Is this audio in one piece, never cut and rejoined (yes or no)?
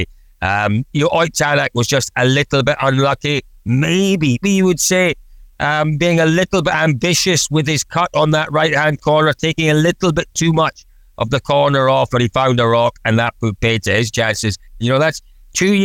no